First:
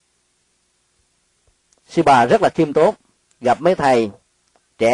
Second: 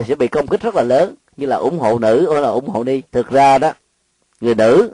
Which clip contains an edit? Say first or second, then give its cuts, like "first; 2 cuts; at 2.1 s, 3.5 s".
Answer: second; 1 cut; at 3.1 s